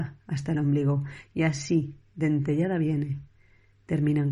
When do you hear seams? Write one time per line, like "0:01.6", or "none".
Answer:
0:02.1